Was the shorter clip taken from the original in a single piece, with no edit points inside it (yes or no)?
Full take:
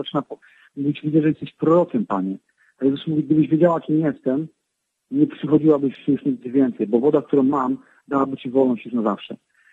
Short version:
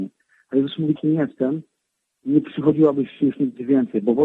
no